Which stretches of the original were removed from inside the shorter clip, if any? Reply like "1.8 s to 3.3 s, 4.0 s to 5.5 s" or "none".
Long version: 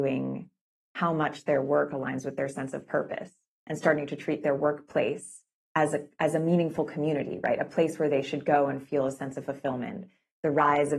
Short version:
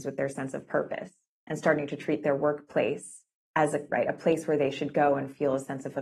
6.1 s to 7.4 s